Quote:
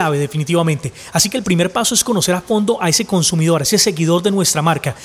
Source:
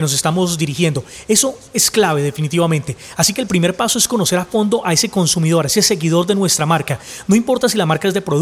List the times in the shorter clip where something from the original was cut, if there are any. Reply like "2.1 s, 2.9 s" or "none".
none

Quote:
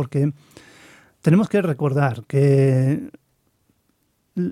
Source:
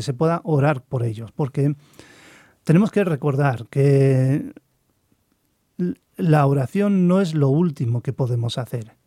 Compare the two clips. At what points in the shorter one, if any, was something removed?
none

